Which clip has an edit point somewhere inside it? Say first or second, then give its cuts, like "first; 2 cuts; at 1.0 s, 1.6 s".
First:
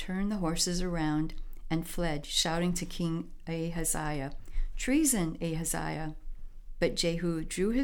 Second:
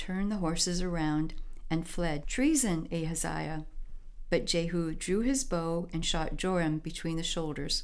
second; 1 cut; at 2.2 s